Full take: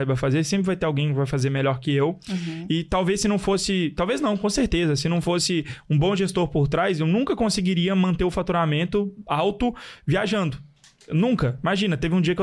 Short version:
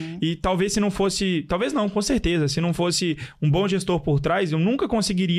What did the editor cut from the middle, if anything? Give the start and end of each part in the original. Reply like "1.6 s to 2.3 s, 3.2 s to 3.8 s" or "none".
none